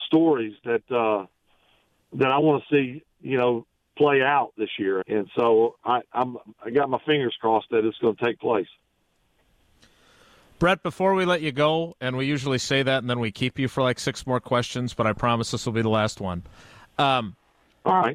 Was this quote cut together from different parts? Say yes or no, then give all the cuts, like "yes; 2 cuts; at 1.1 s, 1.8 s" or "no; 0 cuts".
yes; 1 cut; at 5.0 s